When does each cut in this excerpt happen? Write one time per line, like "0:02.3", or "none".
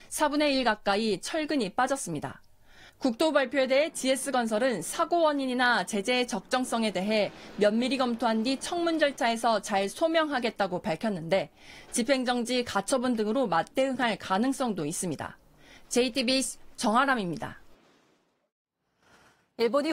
none